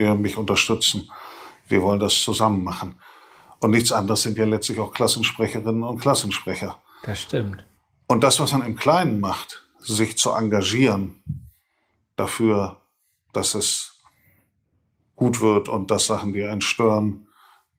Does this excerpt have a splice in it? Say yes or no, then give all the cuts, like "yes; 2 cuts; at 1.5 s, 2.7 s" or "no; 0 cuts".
no; 0 cuts